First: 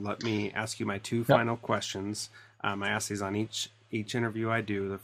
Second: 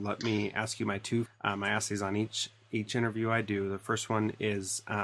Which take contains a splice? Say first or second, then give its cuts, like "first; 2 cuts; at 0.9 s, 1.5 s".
second; 1 cut; at 1.3 s